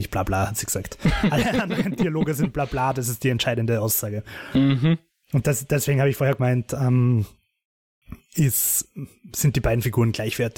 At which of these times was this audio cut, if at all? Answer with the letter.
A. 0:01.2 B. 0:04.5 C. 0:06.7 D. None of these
D